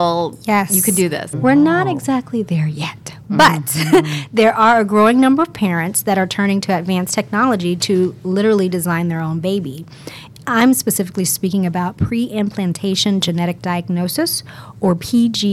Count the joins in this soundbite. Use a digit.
1